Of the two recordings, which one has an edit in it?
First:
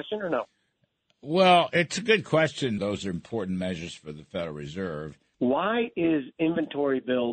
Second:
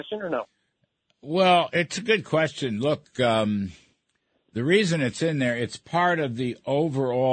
first; 2 cuts; at 2.8 s, 5.3 s

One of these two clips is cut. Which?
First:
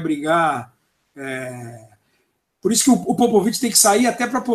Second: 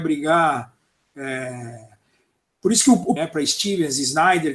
second; 1 cut; at 3.2 s

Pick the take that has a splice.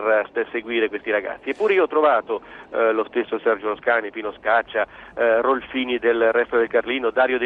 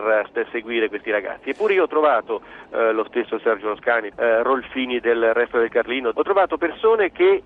second; 2 cuts; at 4.1 s, 6.1 s

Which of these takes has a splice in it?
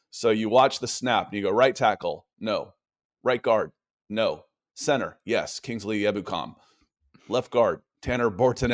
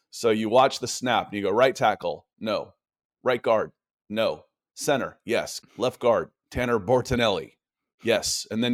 second; 1 cut; at 5.6 s

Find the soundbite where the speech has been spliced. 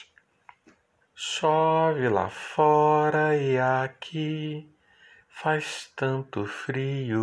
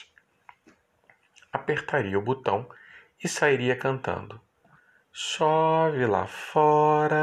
first; 1 cut; at 1.0 s

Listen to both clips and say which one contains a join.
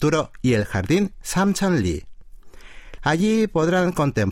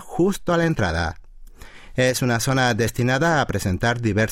first; 1 cut; at 3.0 s

